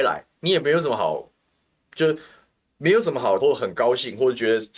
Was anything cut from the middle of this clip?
yes; 1 cut; at 3.4 s

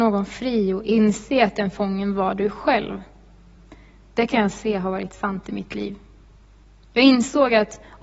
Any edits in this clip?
no; 0 cuts

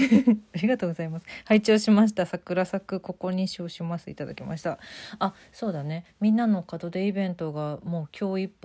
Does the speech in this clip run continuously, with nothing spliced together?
yes; 0 cuts

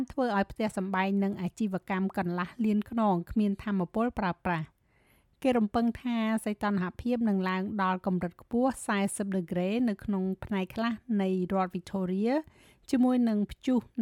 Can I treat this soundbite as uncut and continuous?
yes; 0 cuts

